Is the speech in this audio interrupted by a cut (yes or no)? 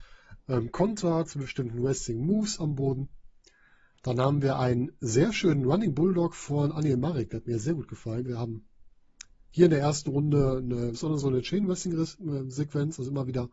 yes